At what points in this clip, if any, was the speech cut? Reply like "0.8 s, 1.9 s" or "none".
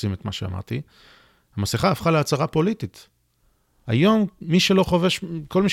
3.8 s